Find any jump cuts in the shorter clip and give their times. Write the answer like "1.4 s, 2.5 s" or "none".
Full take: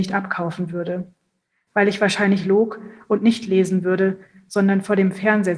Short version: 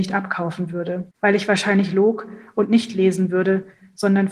1.1 s